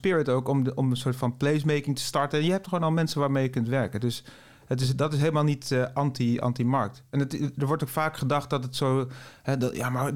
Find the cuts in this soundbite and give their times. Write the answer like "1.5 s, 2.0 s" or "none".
none